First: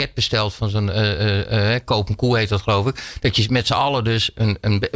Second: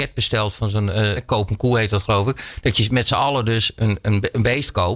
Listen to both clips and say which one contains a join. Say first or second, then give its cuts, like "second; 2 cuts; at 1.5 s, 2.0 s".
second; 1 cut; at 1.2 s